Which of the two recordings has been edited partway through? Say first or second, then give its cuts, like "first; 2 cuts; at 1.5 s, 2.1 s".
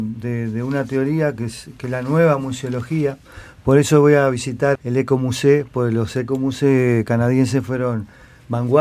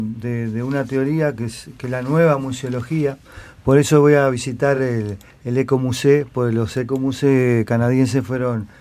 first; 1 cut; at 4.8 s